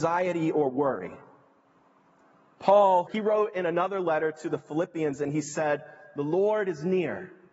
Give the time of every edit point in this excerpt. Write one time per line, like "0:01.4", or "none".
0:03.1